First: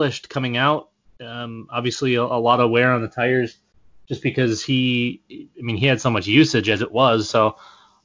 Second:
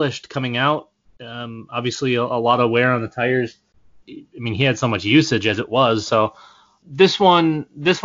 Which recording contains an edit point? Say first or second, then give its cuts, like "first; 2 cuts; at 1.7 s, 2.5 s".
second; 1 cut; at 4.0 s